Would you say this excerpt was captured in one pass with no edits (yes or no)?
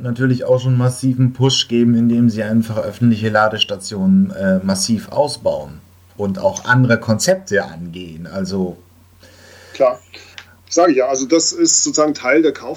yes